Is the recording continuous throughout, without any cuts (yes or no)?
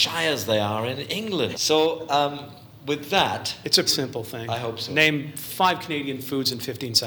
no